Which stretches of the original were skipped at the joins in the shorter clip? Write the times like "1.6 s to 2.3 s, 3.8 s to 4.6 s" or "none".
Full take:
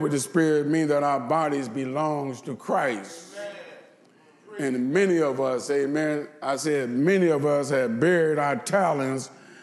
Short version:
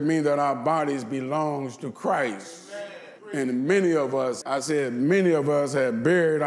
3.8 s to 4.4 s, 5.7 s to 6.4 s